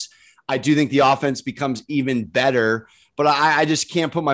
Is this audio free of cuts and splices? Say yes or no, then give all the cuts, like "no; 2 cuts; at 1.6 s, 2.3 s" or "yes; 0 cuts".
yes; 0 cuts